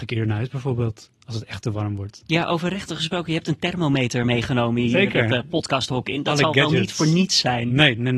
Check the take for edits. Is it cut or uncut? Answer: uncut